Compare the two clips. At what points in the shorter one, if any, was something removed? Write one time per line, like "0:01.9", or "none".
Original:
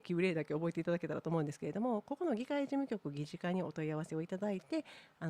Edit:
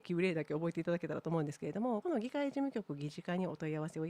0:02.0